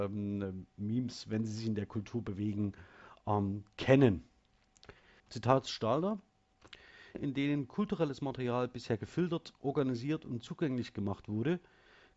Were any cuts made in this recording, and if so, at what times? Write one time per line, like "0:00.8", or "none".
0:05.2
0:07.1